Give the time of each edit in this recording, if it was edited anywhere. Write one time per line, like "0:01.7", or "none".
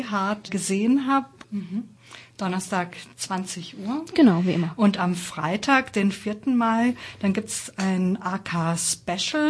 0:01.4